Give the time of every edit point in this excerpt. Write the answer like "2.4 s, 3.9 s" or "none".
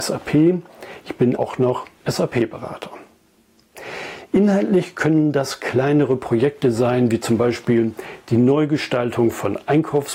1.4 s